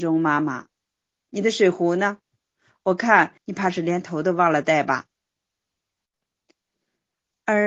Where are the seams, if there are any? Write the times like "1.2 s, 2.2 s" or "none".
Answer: 1.2 s, 3.4 s